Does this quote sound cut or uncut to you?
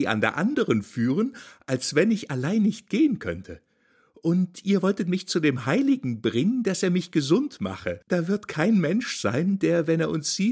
uncut